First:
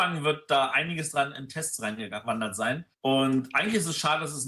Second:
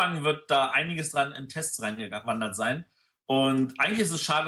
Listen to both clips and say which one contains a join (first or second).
first